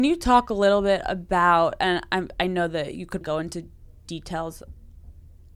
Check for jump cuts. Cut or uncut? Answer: cut